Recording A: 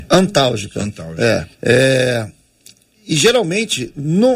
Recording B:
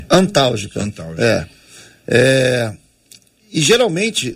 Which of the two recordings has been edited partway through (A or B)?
A